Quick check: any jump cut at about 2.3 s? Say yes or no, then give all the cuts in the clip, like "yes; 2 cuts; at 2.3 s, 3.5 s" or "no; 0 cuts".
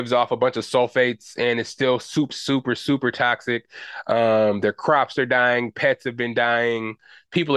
yes; 1 cut; at 2.3 s